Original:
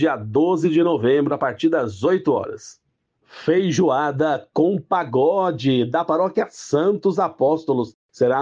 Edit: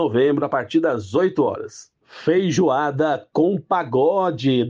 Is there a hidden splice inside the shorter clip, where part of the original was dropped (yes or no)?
yes